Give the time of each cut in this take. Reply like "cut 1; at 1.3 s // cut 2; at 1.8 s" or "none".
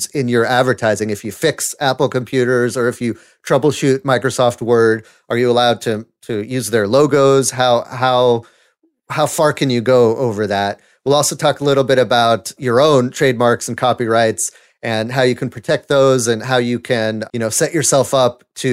cut 1; at 12.6 s // cut 2; at 17.3 s